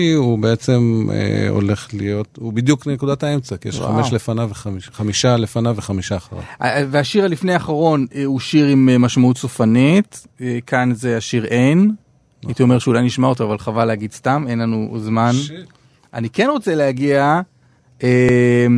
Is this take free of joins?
yes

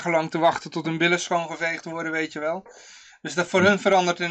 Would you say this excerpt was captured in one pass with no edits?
yes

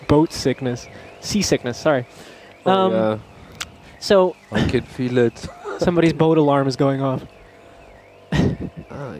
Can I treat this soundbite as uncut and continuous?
yes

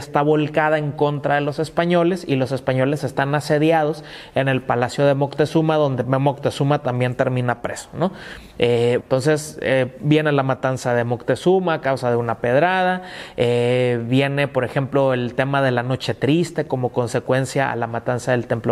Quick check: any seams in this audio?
yes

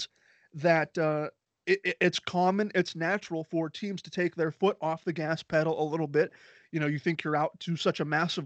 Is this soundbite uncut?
yes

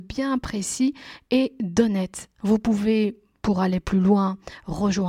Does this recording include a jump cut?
yes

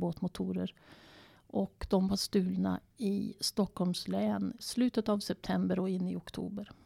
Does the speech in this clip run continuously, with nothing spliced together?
no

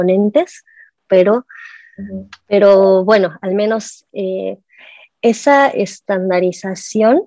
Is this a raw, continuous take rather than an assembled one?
no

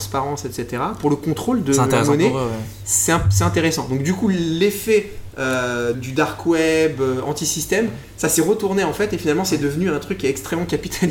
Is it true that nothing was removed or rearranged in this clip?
no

